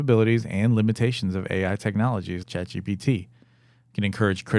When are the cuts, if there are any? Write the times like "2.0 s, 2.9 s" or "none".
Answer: 2.4 s